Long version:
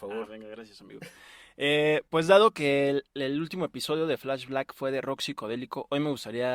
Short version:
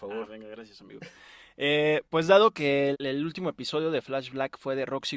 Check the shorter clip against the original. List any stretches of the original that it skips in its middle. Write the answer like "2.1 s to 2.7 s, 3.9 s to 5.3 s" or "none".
2.9 s to 3.1 s